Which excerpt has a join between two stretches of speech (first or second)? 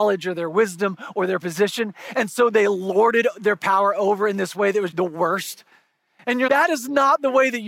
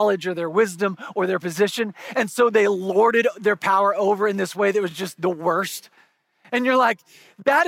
first